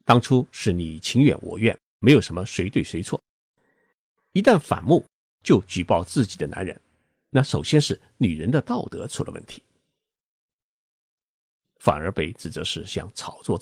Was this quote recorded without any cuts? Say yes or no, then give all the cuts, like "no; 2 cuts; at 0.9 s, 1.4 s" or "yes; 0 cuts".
no; 1 cut; at 11.6 s